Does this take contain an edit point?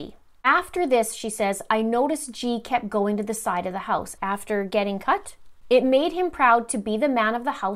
yes; 2 cuts; at 4.2 s, 5.6 s

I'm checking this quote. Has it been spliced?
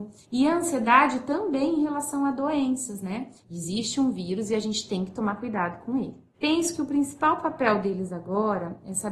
yes; 1 cut; at 3.4 s

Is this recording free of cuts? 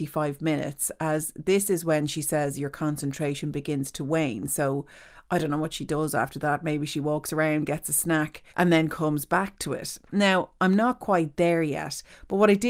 no; 1 cut; at 8.5 s

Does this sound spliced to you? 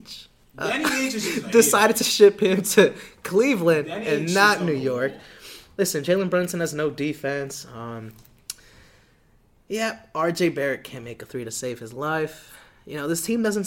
no; 0 cuts

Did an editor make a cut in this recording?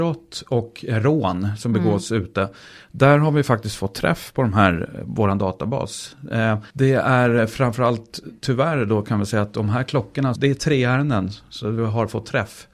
yes; 2 cuts; at 6.7 s, 10.4 s

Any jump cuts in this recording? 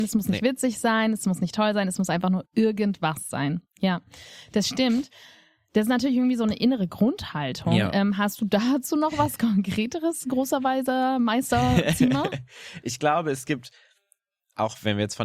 no; 0 cuts

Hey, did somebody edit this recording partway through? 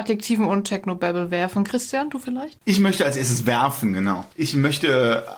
no; 0 cuts

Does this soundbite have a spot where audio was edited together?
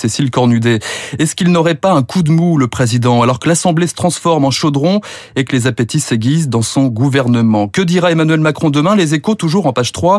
no; 0 cuts

